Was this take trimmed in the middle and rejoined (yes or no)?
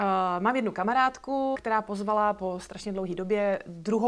yes